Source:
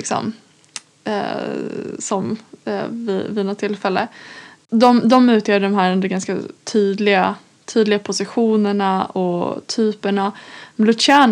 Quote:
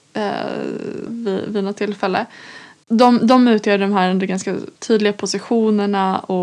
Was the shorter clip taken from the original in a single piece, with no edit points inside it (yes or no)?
no